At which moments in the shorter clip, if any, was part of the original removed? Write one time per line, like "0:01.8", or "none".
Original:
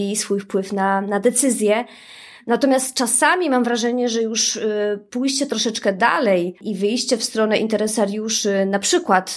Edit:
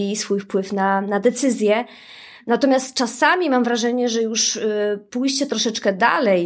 none